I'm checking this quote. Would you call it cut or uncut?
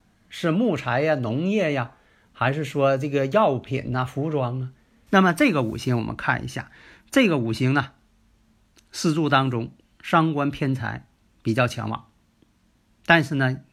cut